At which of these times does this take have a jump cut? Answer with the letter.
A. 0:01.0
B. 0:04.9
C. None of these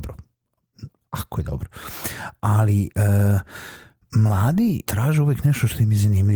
B